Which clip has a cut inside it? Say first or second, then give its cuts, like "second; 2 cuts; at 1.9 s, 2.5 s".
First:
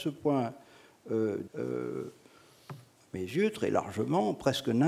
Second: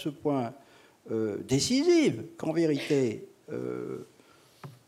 first; 1 cut; at 1.5 s